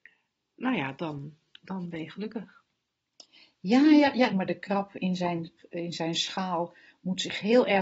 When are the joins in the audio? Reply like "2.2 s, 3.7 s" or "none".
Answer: 4.3 s, 5.6 s